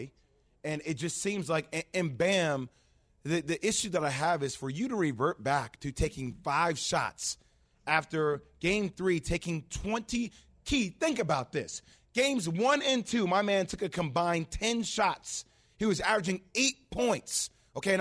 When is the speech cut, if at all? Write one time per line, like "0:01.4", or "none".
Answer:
none